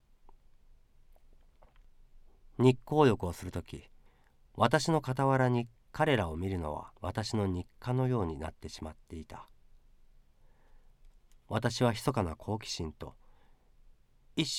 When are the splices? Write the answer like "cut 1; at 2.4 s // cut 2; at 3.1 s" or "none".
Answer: cut 1; at 7.0 s